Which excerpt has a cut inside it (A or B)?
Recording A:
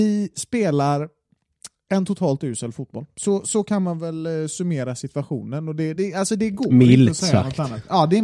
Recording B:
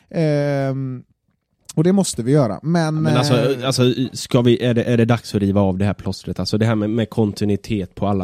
A